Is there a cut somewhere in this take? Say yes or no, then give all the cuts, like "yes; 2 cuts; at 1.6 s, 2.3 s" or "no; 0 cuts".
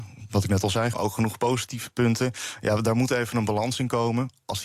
yes; 1 cut; at 0.9 s